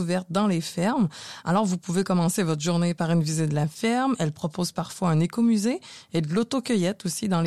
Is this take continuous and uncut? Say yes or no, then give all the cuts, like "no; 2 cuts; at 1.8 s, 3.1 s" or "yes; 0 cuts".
yes; 0 cuts